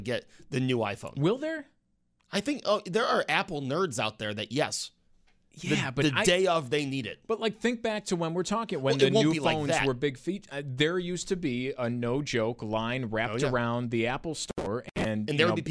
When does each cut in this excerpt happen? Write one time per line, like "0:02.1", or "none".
none